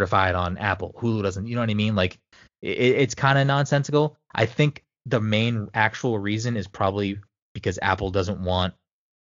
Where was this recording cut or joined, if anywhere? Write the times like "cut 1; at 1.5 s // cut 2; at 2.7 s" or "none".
none